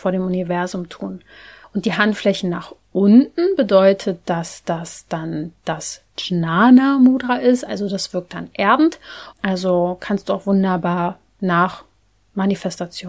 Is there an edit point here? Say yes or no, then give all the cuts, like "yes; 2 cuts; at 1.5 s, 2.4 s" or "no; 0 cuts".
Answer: yes; 2 cuts; at 1.6 s, 9.3 s